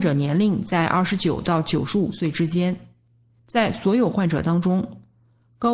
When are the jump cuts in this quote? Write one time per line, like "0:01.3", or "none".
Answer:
0:03.4